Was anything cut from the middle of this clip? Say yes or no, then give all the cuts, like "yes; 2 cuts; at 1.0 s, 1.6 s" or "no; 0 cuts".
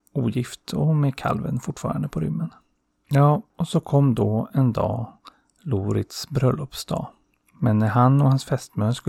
no; 0 cuts